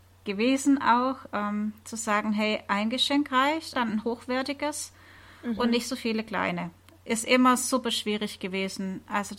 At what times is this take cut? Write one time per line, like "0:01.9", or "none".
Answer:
0:03.7